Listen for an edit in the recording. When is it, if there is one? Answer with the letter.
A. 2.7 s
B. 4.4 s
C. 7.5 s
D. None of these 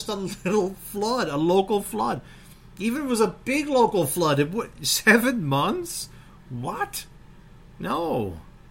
D